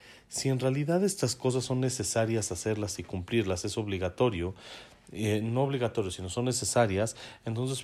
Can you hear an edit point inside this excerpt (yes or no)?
no